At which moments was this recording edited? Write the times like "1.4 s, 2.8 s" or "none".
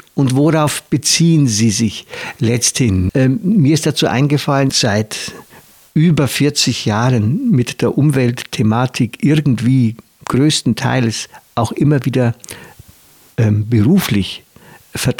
3.1 s, 4.7 s